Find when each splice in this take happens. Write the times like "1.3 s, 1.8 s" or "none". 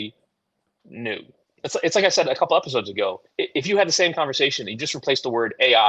1.5 s, 3.3 s